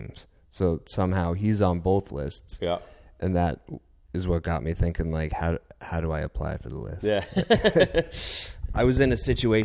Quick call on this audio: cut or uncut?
uncut